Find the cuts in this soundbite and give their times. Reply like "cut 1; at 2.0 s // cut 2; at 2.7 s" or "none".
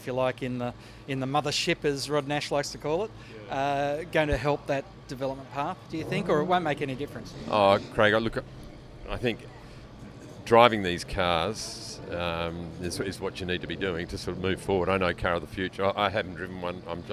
none

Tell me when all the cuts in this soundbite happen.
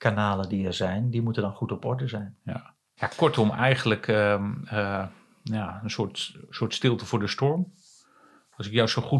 cut 1; at 3.0 s

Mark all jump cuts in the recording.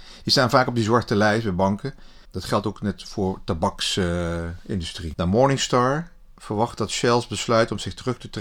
cut 1; at 2.2 s // cut 2; at 5.1 s

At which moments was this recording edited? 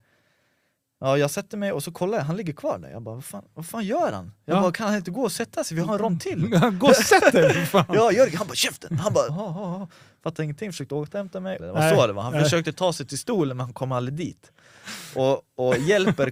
cut 1; at 9.3 s // cut 2; at 11.6 s

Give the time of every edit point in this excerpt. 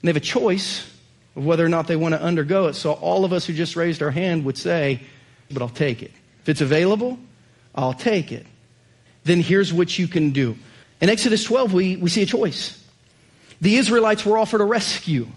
cut 1; at 5.5 s // cut 2; at 9.1 s // cut 3; at 10.8 s

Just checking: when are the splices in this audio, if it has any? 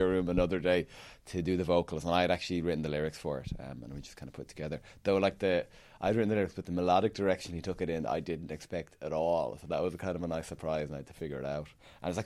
none

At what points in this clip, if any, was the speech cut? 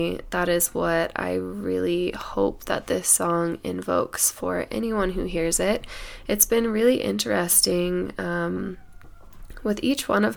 none

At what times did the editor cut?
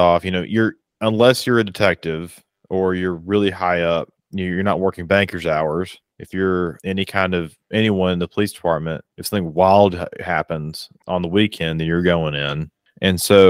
cut 1; at 6.1 s // cut 2; at 9.1 s

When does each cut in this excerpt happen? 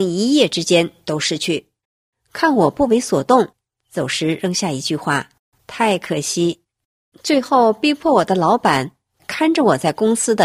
none

